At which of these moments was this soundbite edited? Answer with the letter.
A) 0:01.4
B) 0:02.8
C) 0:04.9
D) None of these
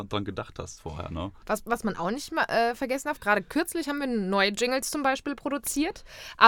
A